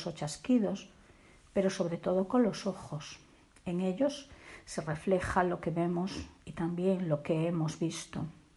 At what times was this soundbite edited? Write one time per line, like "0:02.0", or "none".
none